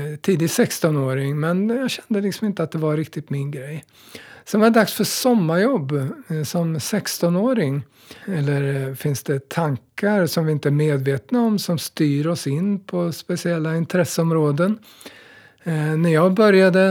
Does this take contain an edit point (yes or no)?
yes